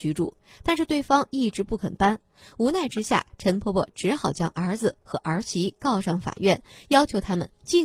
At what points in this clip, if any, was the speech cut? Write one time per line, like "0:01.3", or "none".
none